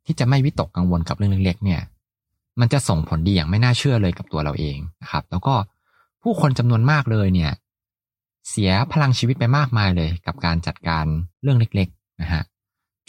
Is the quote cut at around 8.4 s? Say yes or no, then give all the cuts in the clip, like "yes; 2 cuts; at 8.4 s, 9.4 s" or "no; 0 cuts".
no; 2 cuts; at 5.0 s, 11.3 s